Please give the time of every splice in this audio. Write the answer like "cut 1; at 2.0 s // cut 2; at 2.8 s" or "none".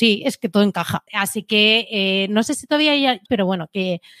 cut 1; at 1.1 s // cut 2; at 3.3 s